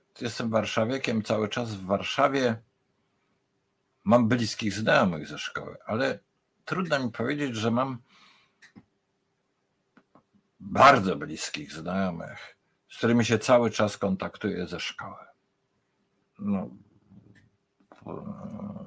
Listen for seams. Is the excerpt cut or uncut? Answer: cut